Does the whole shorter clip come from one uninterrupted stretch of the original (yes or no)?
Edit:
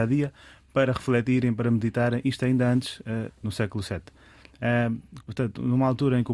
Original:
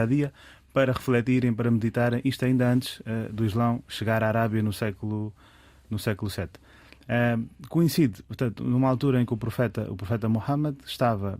no